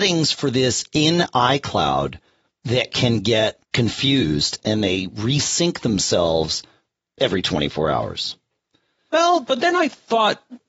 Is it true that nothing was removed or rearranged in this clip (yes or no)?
no